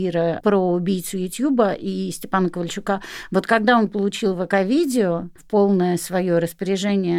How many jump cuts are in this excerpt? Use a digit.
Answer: 0